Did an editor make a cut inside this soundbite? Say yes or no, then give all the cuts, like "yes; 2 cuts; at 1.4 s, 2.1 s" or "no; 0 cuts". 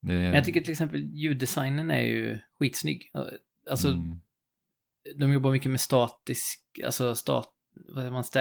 no; 0 cuts